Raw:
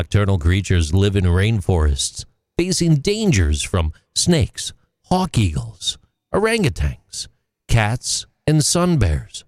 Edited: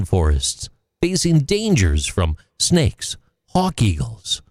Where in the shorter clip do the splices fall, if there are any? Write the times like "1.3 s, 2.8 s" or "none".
none